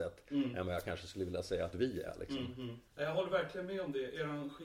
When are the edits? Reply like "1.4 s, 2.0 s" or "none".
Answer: 2.9 s